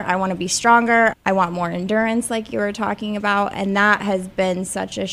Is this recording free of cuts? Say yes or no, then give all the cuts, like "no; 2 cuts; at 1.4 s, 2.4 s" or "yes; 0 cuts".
no; 1 cut; at 1.1 s